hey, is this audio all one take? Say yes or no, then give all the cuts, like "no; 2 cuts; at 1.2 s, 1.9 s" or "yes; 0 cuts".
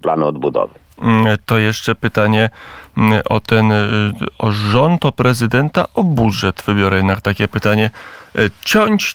no; 1 cut; at 4.3 s